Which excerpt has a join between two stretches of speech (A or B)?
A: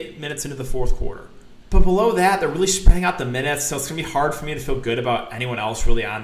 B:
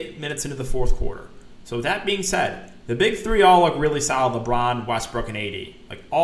A